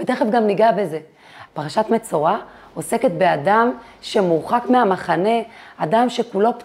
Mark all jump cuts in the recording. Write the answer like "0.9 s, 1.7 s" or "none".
1.5 s